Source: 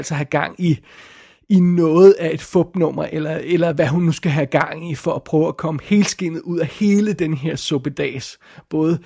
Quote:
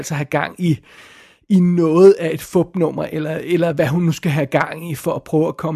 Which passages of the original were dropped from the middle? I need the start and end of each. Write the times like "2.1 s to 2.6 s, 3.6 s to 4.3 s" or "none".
none